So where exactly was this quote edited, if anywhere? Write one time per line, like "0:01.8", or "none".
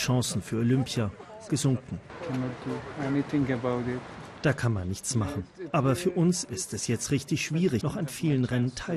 0:07.8